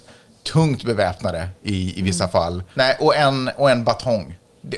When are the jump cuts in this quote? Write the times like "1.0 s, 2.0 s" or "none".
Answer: 2.7 s